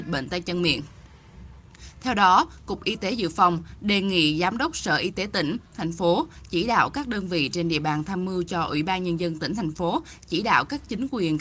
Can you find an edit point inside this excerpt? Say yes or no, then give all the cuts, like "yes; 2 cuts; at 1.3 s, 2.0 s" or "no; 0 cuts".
no; 0 cuts